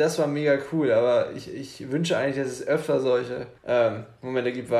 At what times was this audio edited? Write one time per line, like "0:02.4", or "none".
0:03.6